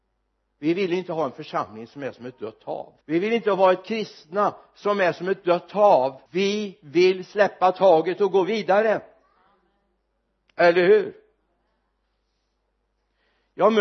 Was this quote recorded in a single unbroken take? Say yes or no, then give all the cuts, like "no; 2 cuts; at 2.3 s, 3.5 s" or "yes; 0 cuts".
no; 2 cuts; at 3.0 s, 6.3 s